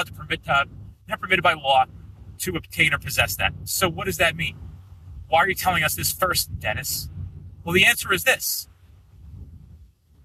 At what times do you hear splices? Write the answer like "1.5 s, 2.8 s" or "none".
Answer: none